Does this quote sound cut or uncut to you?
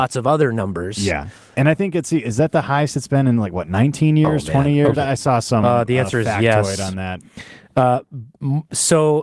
uncut